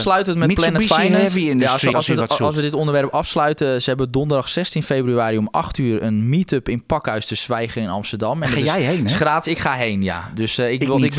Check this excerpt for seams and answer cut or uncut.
cut